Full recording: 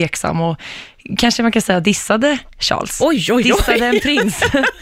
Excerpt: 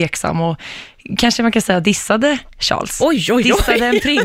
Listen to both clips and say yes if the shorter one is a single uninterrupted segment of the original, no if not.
yes